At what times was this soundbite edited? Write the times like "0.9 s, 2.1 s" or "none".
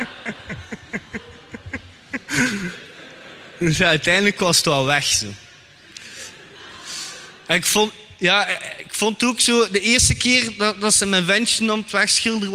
none